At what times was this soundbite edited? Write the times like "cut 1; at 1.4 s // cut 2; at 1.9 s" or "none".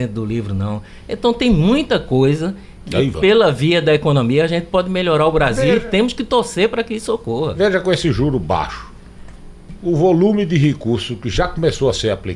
none